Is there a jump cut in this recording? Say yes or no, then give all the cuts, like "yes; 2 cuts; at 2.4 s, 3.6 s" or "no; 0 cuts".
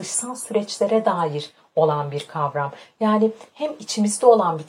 no; 0 cuts